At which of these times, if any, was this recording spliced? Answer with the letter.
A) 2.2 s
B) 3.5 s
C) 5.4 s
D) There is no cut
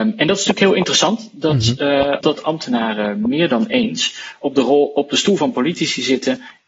A